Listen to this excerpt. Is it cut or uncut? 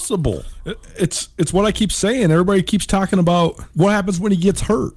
cut